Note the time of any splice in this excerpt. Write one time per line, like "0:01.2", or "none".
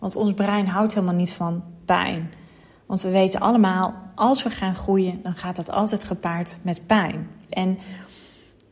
0:07.5

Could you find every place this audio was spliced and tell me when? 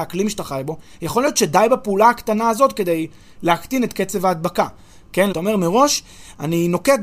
0:05.3

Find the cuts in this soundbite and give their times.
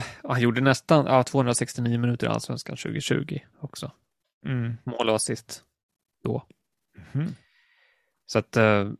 none

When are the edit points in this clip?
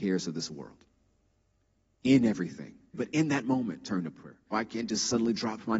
0:02.9
0:04.5

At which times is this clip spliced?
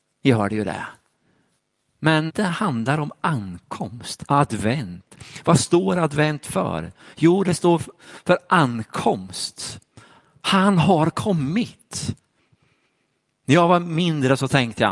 0:02.3
0:04.3

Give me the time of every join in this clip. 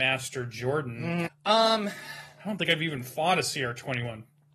0:01.3

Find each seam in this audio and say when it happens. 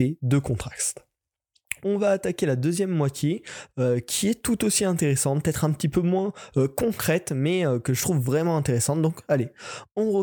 0:01.8

